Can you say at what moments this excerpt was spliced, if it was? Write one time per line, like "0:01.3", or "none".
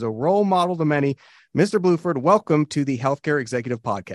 none